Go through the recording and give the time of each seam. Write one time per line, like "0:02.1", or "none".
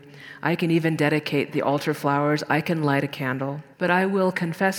0:03.7